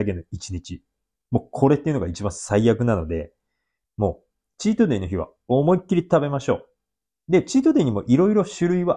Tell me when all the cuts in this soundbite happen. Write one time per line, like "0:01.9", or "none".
none